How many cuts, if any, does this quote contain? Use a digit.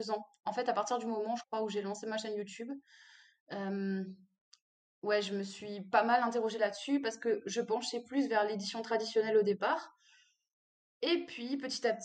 0